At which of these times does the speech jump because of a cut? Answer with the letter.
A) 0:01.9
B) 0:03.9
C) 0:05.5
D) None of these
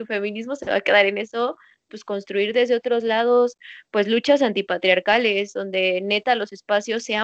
A